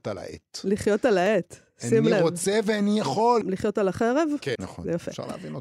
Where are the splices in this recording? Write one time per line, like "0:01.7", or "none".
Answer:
0:03.4
0:04.6